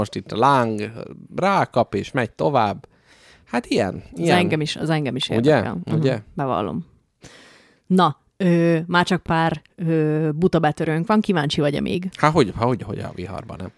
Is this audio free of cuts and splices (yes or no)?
no